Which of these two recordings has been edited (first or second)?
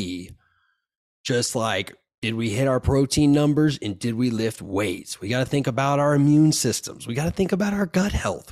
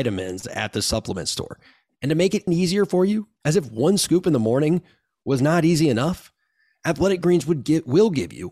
second